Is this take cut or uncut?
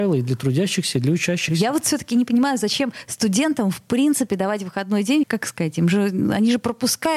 cut